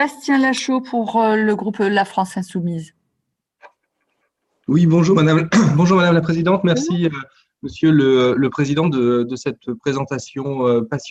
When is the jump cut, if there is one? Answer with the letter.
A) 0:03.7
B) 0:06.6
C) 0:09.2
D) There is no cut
D